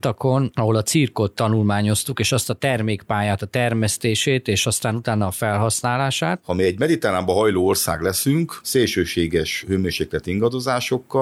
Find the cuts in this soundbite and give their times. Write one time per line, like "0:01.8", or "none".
0:06.4

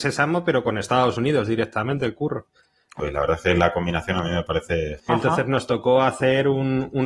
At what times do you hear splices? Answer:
0:03.0
0:05.1

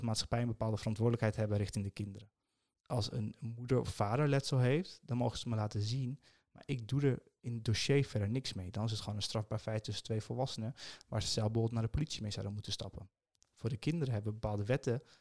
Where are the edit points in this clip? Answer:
none

